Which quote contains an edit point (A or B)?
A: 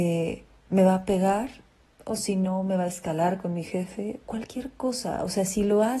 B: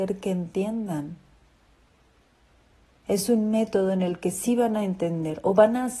A